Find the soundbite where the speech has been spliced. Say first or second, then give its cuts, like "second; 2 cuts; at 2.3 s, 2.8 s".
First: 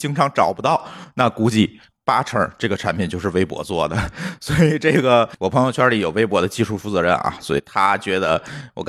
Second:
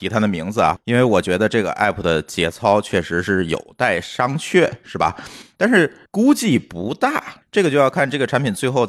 second; 1 cut; at 6.1 s